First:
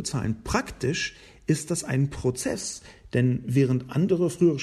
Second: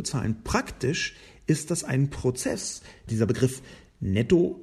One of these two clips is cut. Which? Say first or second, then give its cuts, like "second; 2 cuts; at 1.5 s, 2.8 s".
second; 1 cut; at 3.1 s